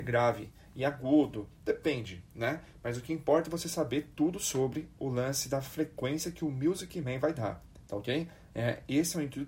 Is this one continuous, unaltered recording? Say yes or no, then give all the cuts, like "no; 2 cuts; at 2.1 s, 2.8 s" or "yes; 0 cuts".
yes; 0 cuts